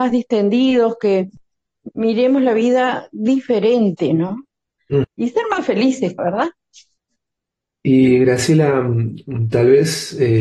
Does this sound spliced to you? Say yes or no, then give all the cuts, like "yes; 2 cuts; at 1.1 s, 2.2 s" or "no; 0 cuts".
yes; 2 cuts; at 5.0 s, 6.2 s